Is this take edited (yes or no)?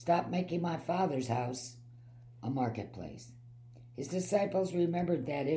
no